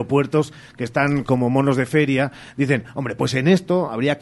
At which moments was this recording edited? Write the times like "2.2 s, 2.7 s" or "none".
none